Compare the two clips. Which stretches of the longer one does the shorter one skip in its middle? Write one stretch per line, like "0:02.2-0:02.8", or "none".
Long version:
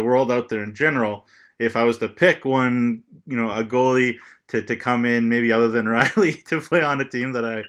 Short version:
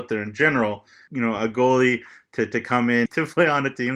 0:01.5-0:03.2
0:05.2-0:06.4